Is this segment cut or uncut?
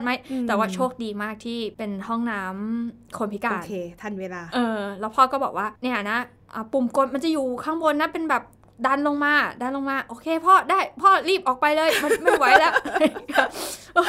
cut